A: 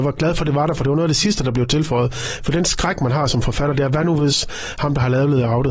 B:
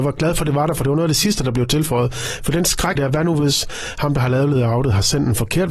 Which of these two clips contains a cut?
B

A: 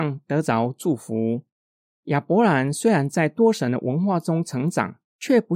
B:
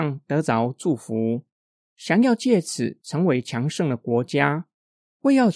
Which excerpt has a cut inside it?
A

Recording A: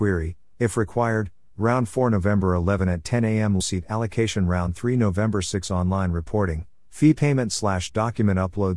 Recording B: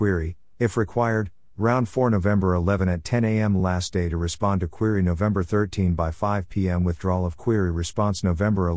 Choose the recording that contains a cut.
A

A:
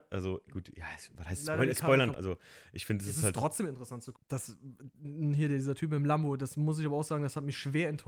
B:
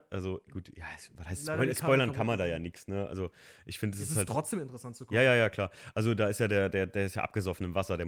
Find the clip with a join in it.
A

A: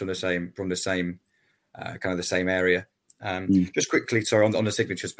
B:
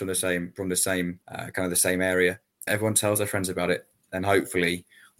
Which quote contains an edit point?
B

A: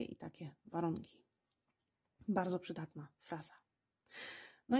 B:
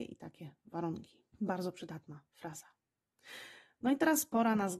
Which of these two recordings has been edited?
B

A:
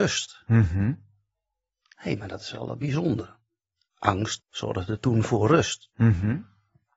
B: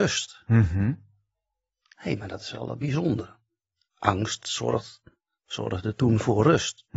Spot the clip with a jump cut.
A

